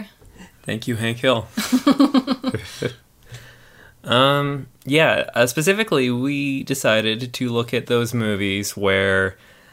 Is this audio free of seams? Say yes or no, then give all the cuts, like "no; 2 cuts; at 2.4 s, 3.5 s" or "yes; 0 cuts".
yes; 0 cuts